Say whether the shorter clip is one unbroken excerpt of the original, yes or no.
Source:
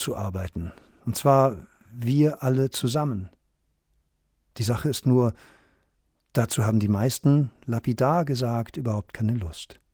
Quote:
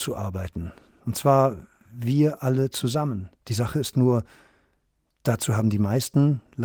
no